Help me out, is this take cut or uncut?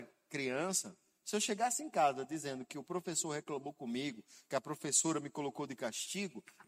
uncut